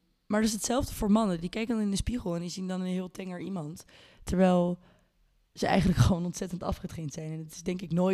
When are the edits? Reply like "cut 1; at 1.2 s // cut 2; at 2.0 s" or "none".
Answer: none